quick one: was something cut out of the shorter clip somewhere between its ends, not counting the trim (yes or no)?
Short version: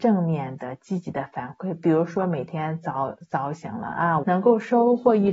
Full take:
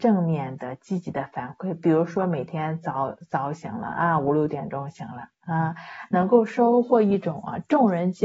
yes